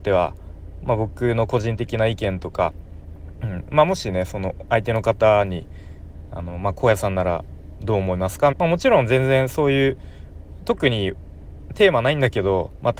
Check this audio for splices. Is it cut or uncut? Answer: cut